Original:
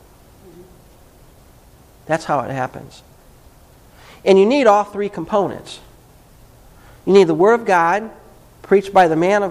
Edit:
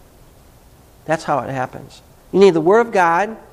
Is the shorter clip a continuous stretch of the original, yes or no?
no